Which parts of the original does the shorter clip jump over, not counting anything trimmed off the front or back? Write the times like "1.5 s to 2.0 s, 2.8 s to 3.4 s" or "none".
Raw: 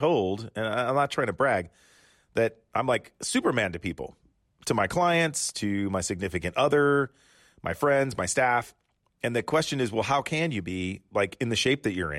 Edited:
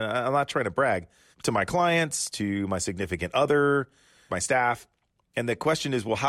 1.9 s to 4.5 s, 7.5 s to 8.2 s